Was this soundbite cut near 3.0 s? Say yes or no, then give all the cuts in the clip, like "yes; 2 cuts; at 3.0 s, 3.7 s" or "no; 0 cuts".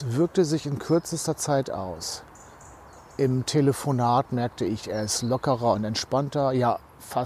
no; 0 cuts